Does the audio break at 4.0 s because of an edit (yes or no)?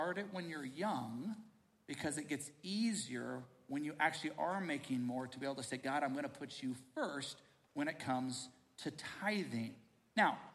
no